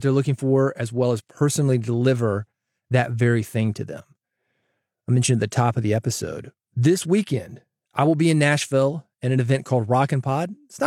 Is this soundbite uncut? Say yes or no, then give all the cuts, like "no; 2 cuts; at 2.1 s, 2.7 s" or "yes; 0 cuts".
yes; 0 cuts